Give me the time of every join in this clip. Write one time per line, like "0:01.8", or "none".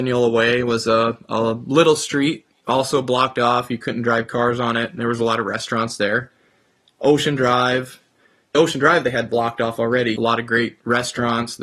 0:08.5
0:10.2